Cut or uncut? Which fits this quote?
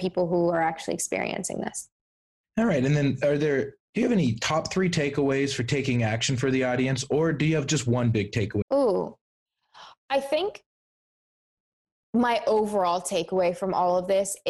cut